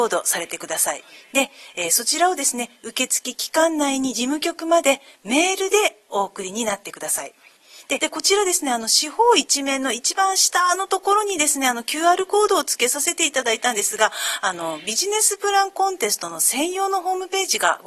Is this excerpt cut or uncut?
cut